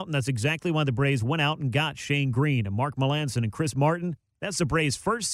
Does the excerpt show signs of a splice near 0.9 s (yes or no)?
no